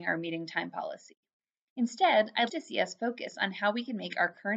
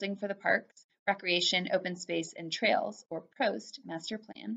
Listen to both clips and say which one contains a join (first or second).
first